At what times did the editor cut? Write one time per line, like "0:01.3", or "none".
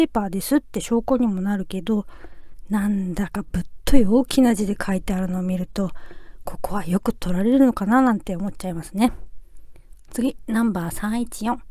none